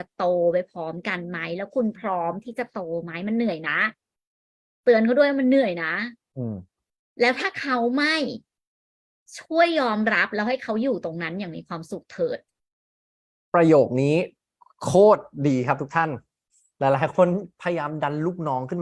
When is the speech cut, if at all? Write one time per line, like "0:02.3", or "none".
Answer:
none